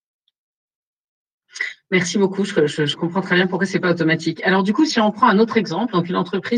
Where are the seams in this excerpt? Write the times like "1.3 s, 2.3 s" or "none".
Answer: 4.9 s